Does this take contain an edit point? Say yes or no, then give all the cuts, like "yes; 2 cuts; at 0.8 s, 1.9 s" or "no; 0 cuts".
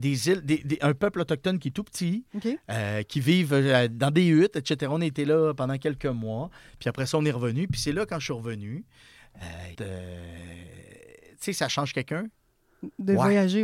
yes; 1 cut; at 9.7 s